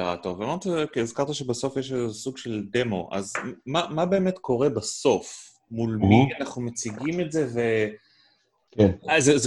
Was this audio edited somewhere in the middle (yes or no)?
no